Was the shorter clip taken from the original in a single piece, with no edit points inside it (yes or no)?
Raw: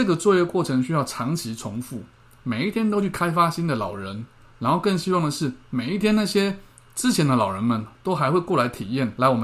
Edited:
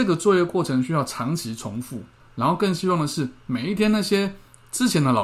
no